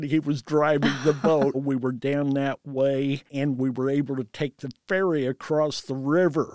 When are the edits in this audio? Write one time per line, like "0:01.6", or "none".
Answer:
0:01.5
0:03.3